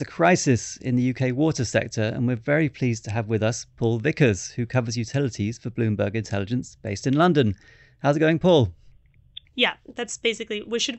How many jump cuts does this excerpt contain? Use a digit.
1